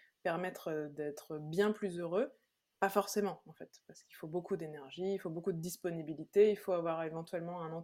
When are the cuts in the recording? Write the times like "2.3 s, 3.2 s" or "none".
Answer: none